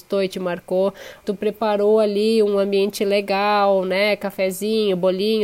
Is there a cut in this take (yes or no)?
yes